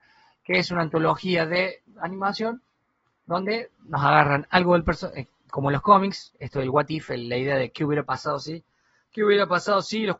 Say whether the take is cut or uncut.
cut